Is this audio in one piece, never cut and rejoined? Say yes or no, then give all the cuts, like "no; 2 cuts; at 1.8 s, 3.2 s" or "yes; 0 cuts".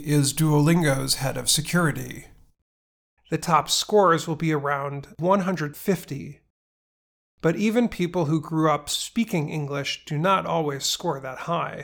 no; 1 cut; at 3.2 s